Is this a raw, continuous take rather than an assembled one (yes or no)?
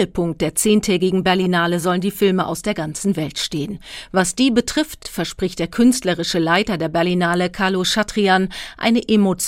yes